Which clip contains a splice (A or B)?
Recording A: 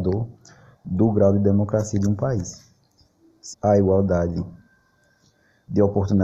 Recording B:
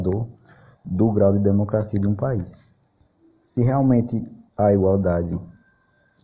A